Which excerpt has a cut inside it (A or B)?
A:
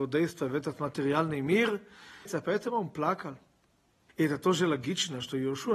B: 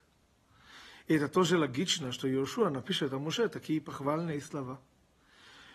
A